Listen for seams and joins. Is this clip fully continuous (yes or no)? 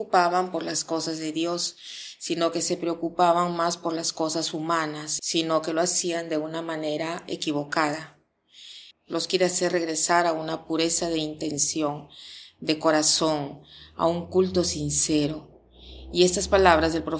no